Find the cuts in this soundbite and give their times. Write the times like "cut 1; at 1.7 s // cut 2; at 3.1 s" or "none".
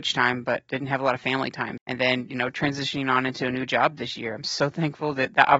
cut 1; at 1.8 s